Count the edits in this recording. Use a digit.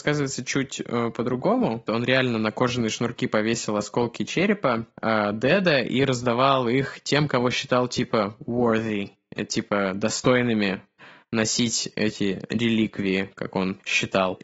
1